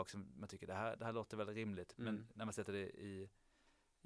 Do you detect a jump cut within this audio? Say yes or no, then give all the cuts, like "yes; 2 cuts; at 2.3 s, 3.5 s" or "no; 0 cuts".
no; 0 cuts